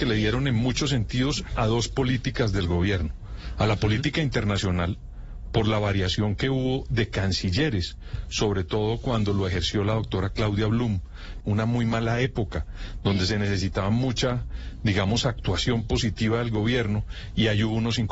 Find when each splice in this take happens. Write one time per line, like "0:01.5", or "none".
0:11.4